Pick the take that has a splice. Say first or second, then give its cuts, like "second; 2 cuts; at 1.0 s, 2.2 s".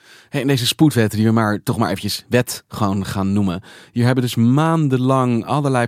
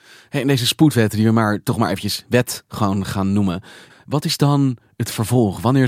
second; 1 cut; at 3.9 s